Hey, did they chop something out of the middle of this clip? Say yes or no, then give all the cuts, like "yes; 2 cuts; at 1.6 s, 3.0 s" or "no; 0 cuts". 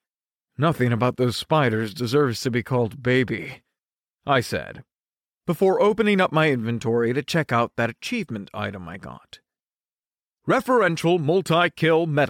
no; 0 cuts